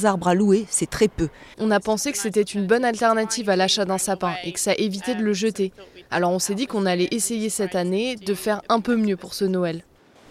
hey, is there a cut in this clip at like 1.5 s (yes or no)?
yes